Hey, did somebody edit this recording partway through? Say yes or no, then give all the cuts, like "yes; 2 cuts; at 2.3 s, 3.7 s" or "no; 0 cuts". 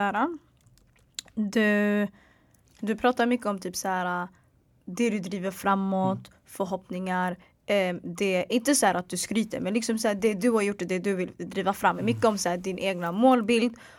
no; 0 cuts